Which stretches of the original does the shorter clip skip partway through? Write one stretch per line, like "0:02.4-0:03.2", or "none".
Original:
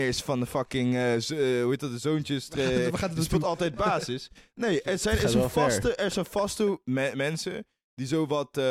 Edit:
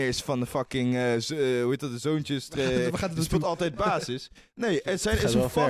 none